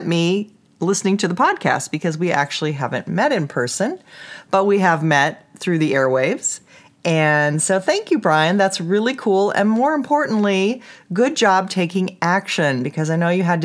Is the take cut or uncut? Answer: uncut